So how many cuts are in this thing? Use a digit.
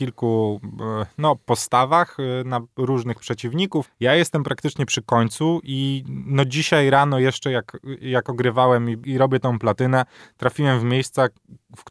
2